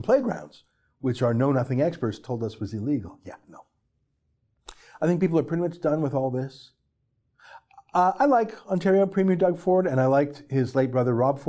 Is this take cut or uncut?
uncut